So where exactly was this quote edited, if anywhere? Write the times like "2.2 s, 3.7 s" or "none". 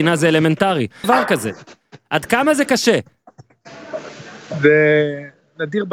1.0 s